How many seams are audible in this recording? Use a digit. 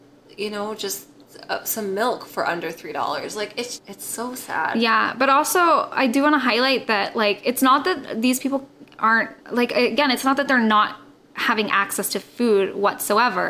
2